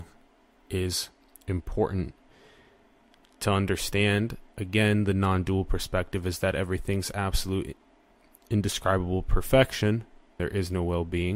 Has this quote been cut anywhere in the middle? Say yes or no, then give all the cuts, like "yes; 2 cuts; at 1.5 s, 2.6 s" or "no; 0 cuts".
yes; 1 cut; at 10.4 s